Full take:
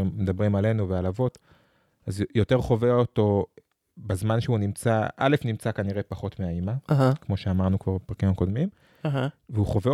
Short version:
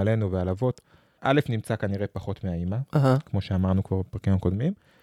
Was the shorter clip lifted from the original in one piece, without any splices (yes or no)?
no